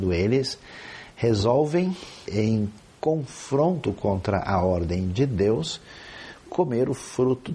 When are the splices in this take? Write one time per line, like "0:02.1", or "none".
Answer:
0:02.2